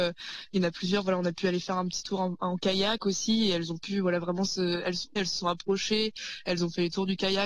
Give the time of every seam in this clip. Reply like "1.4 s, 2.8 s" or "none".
5.2 s

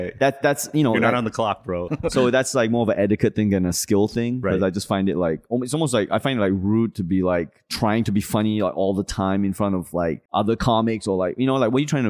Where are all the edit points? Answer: 1.9 s, 10.3 s

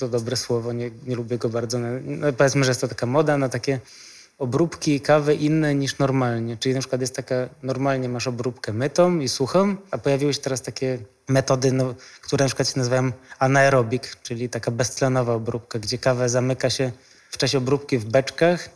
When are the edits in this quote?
none

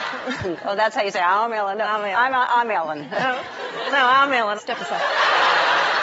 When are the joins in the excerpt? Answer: 4.6 s

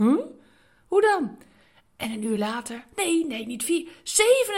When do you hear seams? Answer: 2.9 s

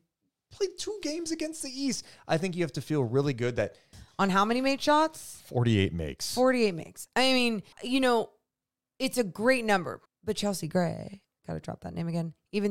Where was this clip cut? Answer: 3.9 s, 7.7 s, 10.1 s

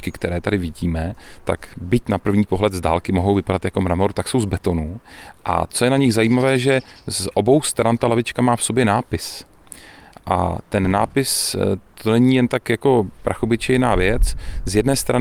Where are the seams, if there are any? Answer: none

